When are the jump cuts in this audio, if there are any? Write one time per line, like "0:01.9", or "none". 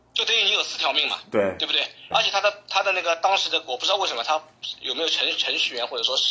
0:02.1